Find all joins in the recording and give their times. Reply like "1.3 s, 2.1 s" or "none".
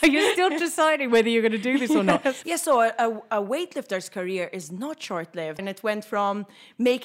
2.4 s, 5.6 s